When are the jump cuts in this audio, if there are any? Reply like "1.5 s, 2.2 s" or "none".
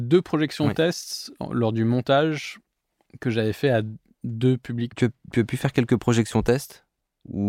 4.9 s